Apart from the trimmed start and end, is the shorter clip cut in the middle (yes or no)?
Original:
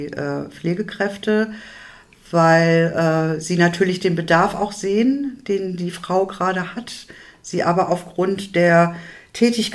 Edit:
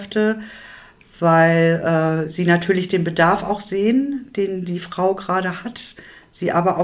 no